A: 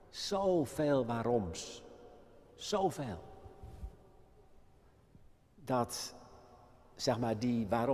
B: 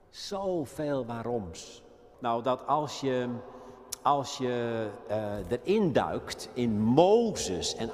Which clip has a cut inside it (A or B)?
B